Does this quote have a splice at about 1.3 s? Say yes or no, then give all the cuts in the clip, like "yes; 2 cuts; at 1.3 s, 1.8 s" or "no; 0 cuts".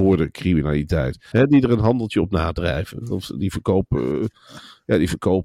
yes; 1 cut; at 1.3 s